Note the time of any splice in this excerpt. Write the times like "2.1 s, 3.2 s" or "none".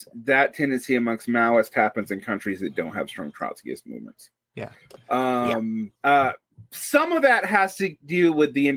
6.0 s